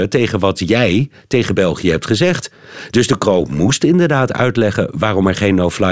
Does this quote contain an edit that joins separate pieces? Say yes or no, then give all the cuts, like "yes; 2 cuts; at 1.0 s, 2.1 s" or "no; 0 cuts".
no; 0 cuts